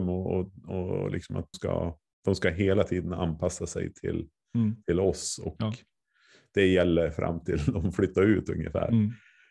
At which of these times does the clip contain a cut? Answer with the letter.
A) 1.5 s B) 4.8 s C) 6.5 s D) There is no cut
A